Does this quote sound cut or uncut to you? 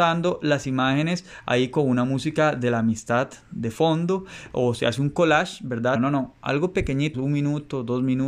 cut